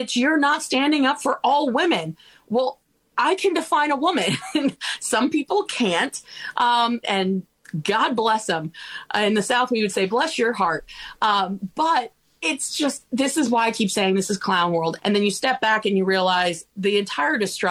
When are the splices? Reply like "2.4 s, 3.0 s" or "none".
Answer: 7.0 s, 15.0 s